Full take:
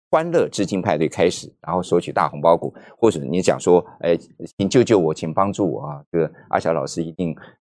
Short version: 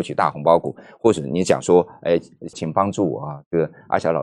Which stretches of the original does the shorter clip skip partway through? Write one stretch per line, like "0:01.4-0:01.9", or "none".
0:04.5-0:05.1